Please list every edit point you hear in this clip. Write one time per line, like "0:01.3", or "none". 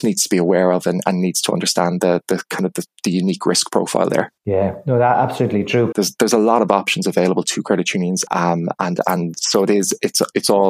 0:04.4
0:05.9
0:08.3